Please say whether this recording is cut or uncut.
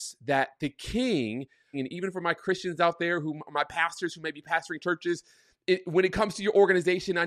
cut